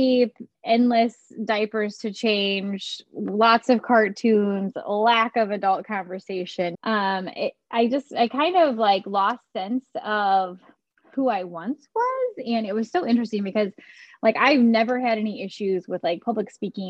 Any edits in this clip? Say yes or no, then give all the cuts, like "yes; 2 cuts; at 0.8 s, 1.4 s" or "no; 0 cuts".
yes; 1 cut; at 6.7 s